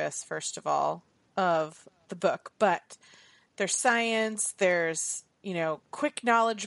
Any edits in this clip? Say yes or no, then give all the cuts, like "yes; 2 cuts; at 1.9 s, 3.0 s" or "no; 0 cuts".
no; 0 cuts